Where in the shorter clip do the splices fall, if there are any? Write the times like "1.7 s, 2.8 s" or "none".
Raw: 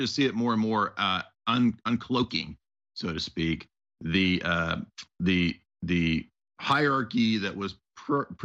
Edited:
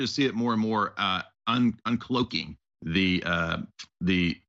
2.7 s